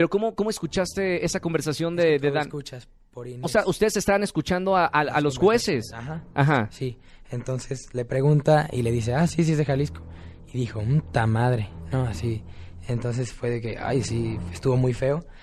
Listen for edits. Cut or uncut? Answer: uncut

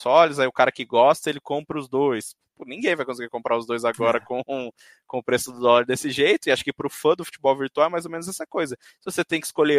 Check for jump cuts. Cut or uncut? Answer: uncut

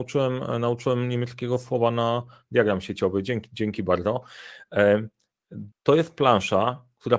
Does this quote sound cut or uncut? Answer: cut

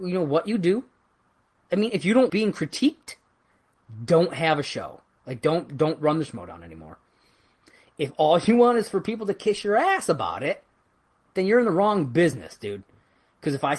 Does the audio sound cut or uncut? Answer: cut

